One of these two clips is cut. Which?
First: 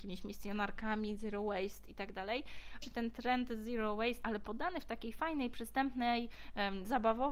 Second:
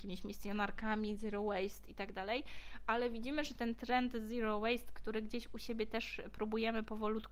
first; 2 cuts; at 2.8 s, 4.2 s

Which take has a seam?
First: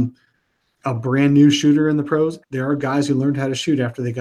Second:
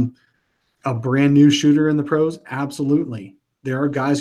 first; 1 cut; at 2.4 s

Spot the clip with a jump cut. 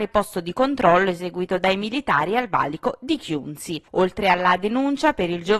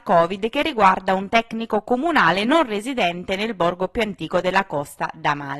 first; 1 cut; at 3.8 s

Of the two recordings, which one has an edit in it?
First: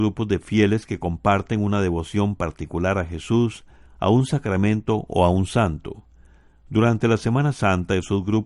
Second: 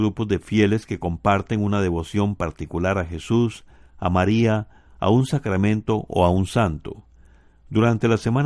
first; 1 cut; at 3.9 s

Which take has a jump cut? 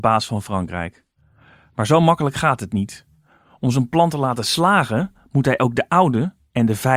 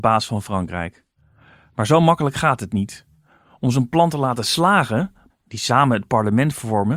second; 1 cut; at 5.3 s

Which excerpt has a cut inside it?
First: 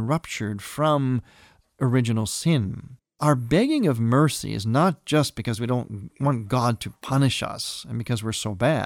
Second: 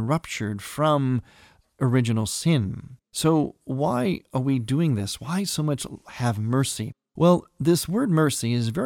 second; 1 cut; at 3.0 s

